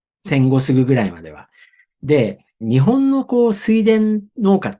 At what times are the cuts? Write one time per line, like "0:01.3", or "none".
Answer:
0:02.6